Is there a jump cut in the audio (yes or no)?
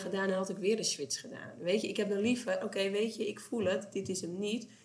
no